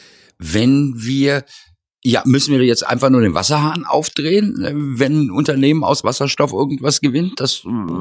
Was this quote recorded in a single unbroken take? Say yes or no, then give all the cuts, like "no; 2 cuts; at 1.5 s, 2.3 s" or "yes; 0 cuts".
yes; 0 cuts